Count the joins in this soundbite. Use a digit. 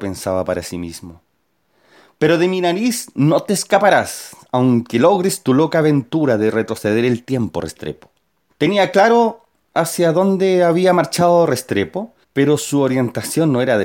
2